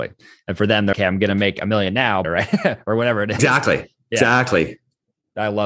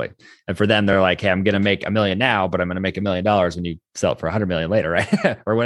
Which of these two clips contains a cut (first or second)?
first